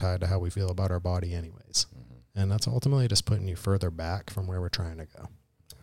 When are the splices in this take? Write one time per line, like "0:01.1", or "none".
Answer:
none